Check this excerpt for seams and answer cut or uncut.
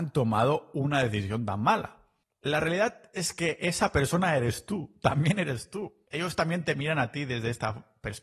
cut